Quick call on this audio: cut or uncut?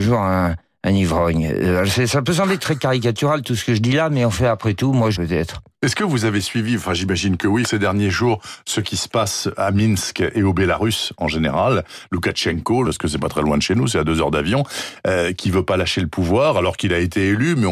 cut